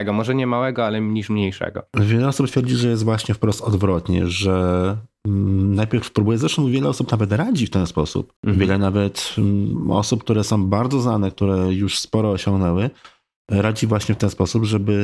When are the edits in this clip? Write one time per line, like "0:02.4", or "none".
0:08.4

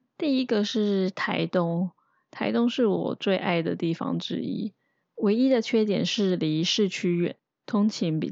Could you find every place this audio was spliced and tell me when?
0:05.0

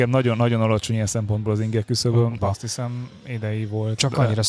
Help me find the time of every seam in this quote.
0:02.4

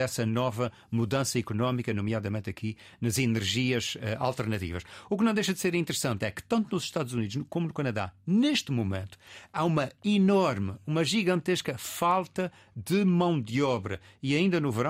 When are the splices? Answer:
none

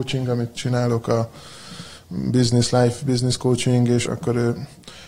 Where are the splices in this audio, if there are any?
0:04.1

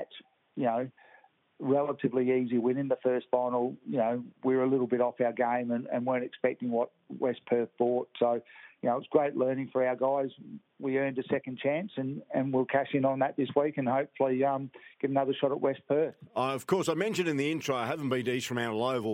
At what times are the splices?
none

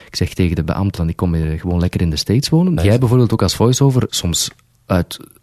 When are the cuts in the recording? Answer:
0:01.0
0:02.8
0:04.1

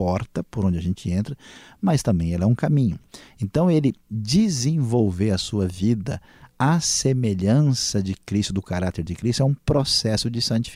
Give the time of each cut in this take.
0:03.3

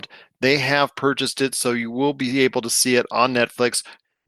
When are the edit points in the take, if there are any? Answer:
none

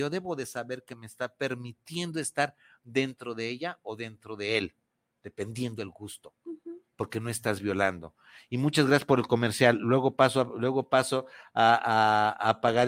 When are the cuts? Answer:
none

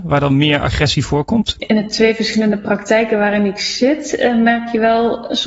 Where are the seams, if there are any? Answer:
0:01.6

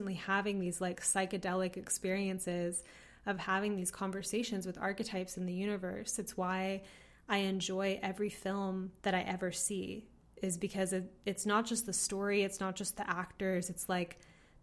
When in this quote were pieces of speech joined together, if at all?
0:09.0

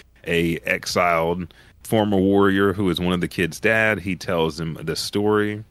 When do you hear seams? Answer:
0:01.8

